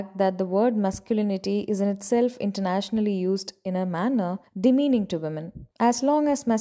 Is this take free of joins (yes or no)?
no